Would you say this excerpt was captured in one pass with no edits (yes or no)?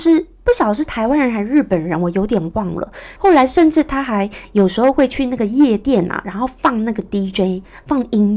no